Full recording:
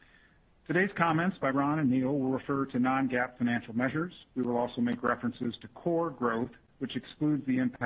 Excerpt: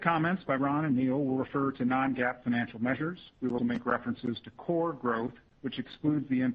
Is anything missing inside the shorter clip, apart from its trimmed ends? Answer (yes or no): yes